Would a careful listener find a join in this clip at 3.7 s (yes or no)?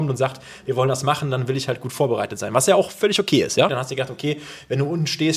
yes